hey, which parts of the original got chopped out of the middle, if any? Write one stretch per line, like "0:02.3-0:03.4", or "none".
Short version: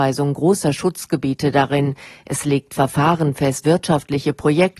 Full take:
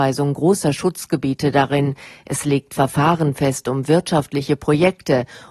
0:03.6-0:03.9